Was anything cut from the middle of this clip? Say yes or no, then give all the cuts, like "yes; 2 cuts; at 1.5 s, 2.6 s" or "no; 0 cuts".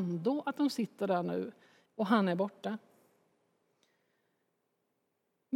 yes; 1 cut; at 1.9 s